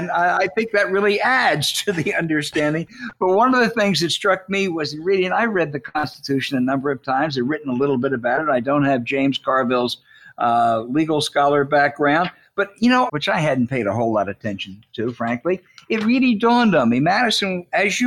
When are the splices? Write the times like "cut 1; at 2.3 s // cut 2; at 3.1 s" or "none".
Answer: cut 1; at 13.1 s